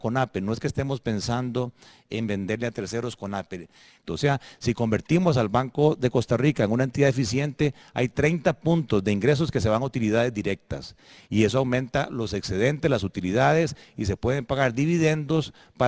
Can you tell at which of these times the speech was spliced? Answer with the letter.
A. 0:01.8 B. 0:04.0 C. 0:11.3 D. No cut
B